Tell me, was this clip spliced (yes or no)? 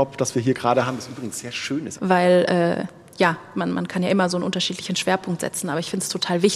yes